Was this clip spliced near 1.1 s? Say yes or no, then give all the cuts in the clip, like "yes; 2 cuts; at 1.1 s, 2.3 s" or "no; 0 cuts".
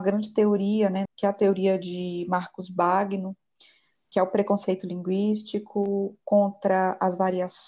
yes; 1 cut; at 1.1 s